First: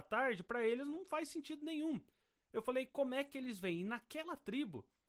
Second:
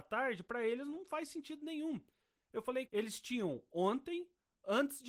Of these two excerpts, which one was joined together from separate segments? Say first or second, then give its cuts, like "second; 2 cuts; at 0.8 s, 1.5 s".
second; 1 cut; at 2.9 s